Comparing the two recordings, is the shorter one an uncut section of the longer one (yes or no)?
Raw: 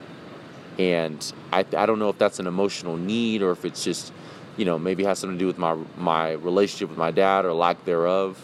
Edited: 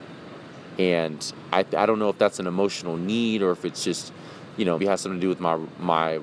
no